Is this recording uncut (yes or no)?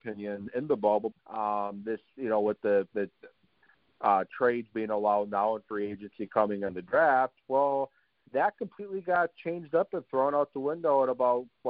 no